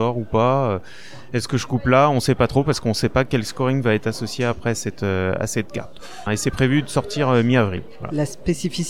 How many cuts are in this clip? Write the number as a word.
one